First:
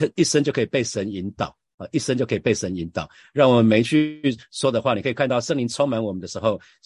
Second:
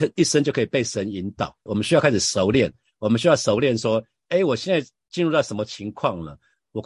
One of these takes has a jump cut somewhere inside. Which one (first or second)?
second